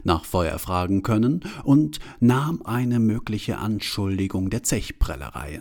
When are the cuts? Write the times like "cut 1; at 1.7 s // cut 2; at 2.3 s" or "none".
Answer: cut 1; at 2.7 s